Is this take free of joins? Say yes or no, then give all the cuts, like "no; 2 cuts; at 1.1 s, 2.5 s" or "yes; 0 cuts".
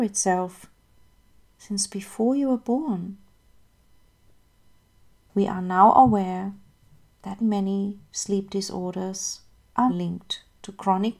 no; 2 cuts; at 7.4 s, 9.9 s